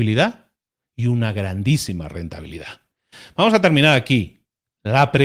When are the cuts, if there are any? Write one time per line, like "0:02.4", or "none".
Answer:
none